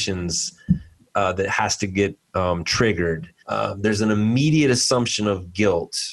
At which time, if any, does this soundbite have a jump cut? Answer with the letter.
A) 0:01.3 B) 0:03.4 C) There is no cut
B